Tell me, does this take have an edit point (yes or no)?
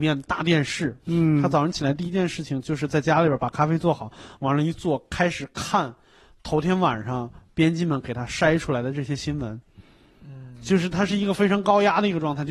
no